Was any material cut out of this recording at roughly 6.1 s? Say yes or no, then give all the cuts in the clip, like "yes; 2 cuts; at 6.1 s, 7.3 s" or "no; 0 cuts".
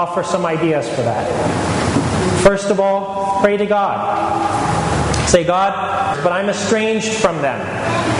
yes; 1 cut; at 6.1 s